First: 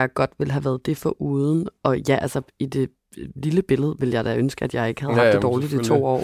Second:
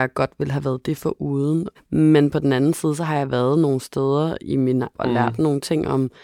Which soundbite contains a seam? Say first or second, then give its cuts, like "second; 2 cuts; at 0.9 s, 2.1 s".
second; 2 cuts; at 1.7 s, 4.9 s